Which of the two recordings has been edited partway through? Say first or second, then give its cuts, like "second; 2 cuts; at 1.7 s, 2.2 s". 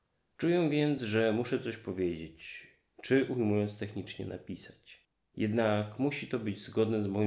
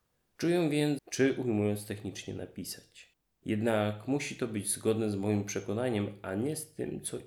second; 1 cut; at 1.0 s